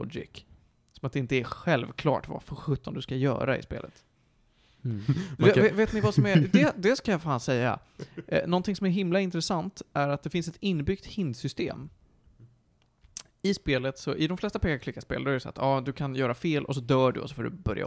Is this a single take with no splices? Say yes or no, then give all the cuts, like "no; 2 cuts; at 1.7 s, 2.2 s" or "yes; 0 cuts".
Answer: yes; 0 cuts